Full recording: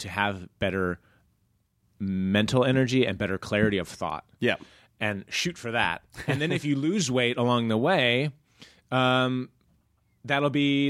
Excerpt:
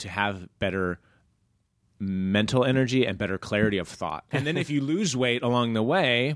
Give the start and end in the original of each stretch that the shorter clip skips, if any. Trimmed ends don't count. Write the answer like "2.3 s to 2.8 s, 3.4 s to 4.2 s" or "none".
4.3 s to 6.3 s